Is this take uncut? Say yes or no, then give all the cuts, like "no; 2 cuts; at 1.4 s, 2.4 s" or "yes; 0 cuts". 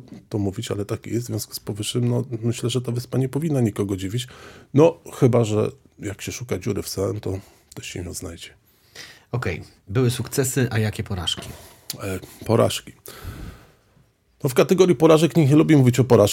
yes; 0 cuts